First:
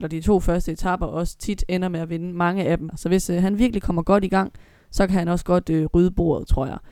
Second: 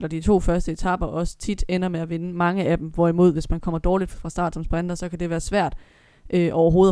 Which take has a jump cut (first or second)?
first